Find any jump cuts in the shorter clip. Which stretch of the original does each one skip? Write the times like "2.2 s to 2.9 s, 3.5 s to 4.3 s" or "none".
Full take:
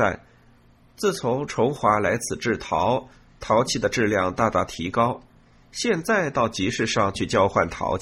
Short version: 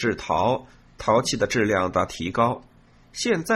4.4 s to 4.5 s